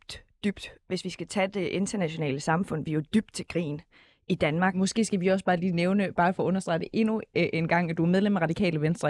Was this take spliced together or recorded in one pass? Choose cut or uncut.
uncut